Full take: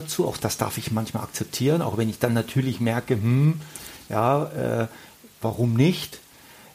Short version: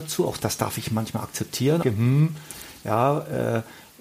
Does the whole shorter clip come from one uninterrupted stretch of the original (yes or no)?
no